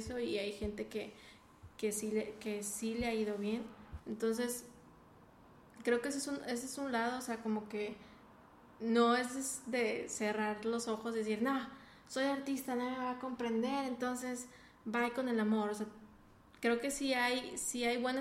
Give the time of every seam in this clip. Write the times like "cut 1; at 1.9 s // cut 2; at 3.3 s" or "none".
cut 1; at 4.0 s